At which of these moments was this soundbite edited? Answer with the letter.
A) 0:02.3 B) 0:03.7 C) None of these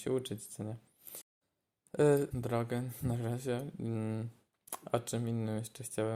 A